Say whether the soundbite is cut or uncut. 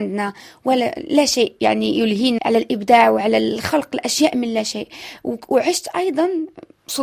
cut